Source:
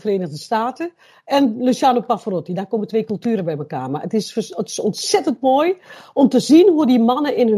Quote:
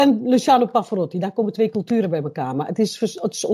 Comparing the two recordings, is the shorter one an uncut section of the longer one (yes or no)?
yes